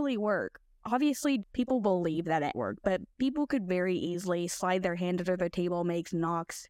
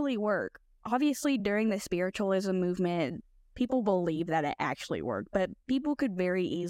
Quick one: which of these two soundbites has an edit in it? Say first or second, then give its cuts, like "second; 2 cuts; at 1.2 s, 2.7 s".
first; 2 cuts; at 1.4 s, 2.5 s